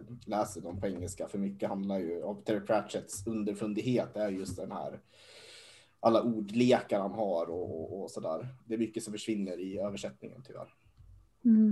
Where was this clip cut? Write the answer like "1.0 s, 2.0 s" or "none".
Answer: 8.6 s